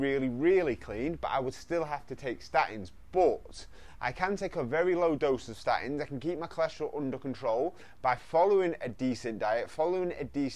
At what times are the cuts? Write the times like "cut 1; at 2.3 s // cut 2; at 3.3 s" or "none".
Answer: none